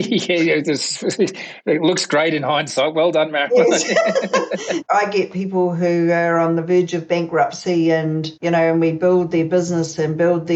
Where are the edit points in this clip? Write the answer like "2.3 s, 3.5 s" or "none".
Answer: 4.8 s, 8.4 s